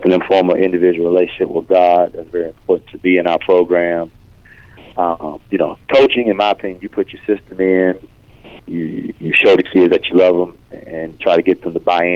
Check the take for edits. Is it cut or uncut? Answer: cut